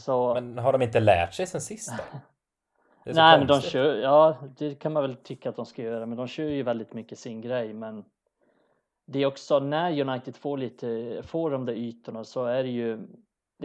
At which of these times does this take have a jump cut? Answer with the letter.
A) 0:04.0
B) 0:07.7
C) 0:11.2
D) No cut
D